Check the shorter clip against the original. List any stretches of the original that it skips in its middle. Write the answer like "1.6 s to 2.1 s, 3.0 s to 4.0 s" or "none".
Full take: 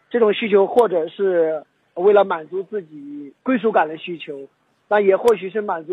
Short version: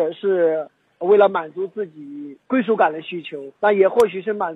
4.5 s to 4.8 s